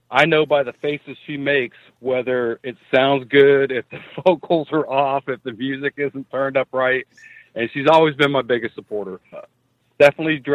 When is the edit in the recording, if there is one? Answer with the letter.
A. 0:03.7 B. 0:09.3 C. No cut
B